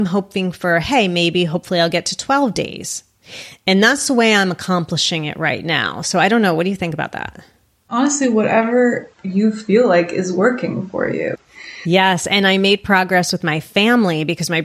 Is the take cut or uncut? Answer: cut